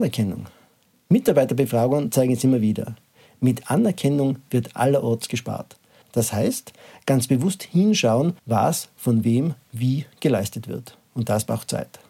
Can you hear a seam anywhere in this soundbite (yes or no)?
yes